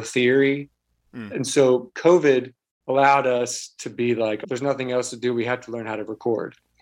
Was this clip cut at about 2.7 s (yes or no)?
no